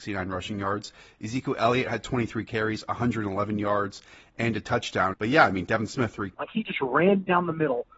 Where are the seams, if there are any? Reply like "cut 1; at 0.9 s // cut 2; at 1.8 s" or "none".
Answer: cut 1; at 5.1 s // cut 2; at 6.3 s